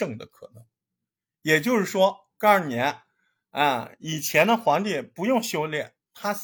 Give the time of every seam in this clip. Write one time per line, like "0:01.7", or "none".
none